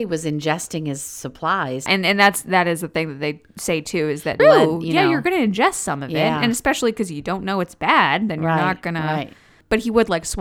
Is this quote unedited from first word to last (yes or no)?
no